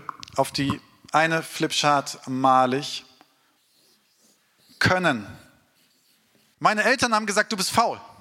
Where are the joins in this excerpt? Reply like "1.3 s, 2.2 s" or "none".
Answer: 6.5 s